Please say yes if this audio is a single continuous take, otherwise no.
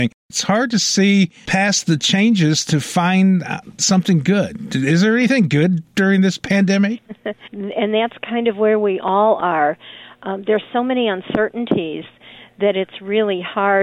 no